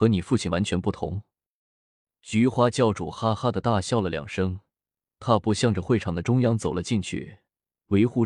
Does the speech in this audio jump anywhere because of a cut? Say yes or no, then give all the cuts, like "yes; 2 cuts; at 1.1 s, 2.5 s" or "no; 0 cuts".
no; 0 cuts